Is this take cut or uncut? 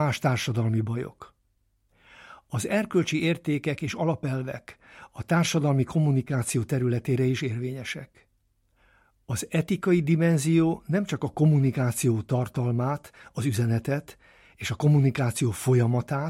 uncut